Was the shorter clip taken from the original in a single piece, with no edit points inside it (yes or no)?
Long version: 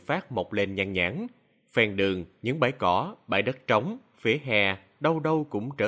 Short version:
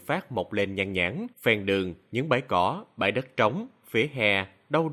no